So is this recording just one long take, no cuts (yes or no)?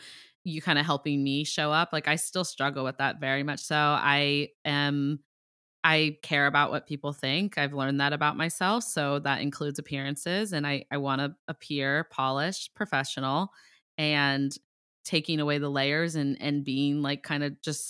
yes